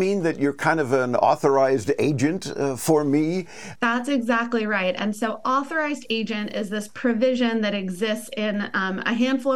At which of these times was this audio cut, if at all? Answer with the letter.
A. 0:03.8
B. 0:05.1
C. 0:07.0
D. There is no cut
A